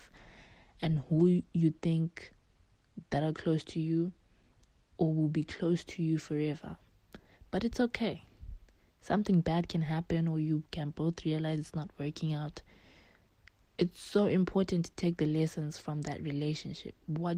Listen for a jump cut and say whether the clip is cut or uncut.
uncut